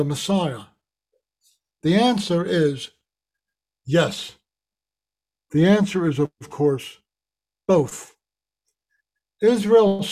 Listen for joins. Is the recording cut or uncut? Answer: uncut